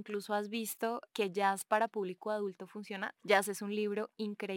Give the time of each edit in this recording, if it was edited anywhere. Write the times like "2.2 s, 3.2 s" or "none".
1.1 s, 3.2 s